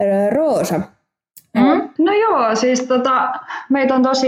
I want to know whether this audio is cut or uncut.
cut